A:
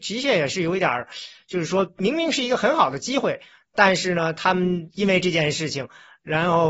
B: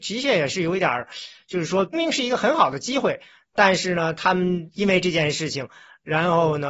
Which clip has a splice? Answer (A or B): B